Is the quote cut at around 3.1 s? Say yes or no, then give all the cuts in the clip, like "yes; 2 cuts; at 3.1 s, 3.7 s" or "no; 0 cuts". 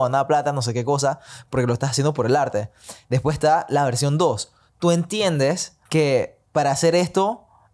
no; 1 cut; at 5.9 s